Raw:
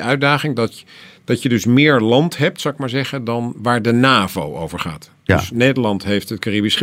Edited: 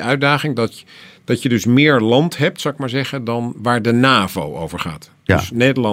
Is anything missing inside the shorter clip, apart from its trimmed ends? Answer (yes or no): no